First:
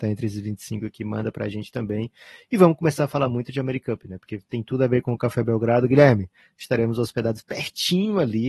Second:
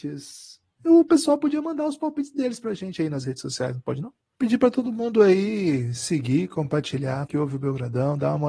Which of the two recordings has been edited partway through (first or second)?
second